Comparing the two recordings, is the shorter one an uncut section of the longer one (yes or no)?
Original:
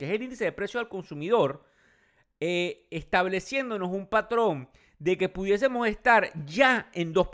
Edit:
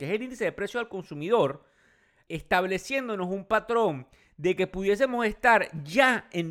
no